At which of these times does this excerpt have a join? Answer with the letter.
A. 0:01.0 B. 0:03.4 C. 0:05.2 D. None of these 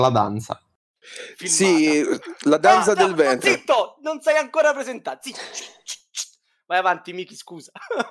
A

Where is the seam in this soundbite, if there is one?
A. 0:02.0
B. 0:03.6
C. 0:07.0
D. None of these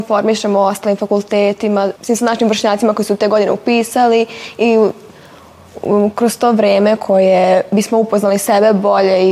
A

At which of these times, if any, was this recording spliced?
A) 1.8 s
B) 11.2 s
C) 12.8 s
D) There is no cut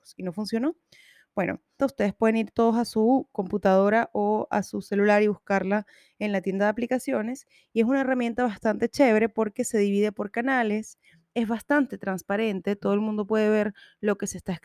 A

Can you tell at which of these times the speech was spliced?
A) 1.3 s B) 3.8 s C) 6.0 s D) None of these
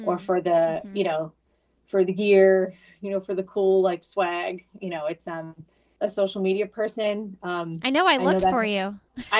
C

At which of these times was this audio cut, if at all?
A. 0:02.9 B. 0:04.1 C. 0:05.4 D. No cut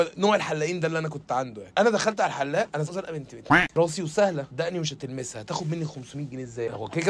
A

